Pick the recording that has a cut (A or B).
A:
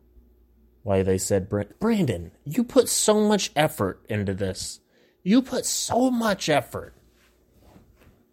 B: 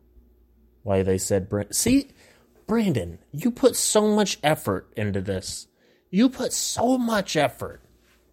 A